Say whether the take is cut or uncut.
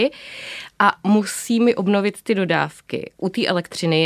uncut